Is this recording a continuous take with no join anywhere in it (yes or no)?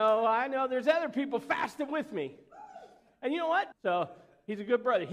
no